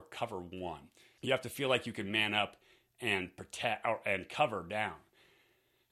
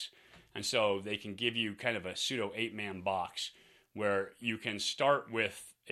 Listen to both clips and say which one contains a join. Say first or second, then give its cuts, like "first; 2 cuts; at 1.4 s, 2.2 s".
first; 1 cut; at 1.2 s